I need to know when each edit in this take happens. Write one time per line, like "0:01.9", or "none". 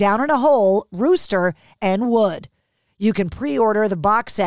0:01.8